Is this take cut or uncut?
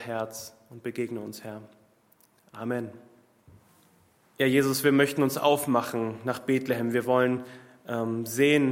cut